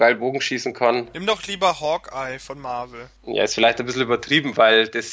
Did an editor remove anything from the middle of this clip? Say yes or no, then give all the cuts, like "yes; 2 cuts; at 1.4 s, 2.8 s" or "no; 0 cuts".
yes; 1 cut; at 3.2 s